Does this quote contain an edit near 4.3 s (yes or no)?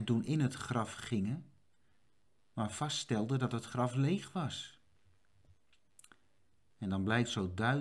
no